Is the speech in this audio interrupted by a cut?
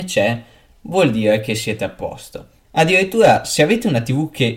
yes; 1 cut; at 2.6 s

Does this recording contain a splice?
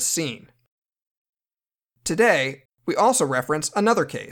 yes; 1 cut; at 2.7 s

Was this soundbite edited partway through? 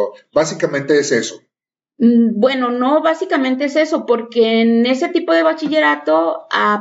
no; 0 cuts

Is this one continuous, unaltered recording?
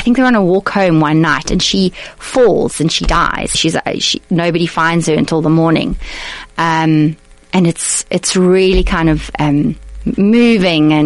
no; 1 cut; at 3.5 s

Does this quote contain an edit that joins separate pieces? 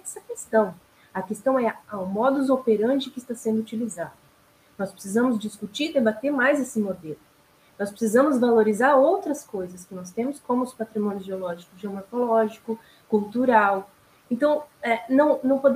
no; 0 cuts

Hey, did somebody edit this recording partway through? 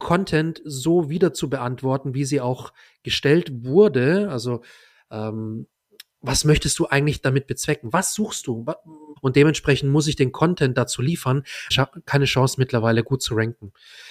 yes; 2 cuts; at 9.2 s, 11.7 s

